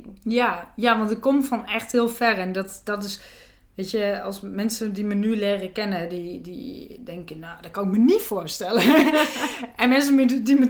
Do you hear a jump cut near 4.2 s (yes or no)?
no